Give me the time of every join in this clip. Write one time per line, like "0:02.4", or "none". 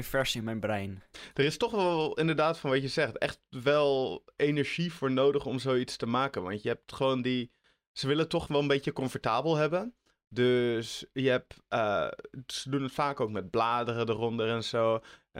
none